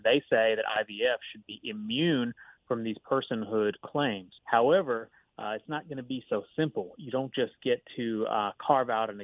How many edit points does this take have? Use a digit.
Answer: 1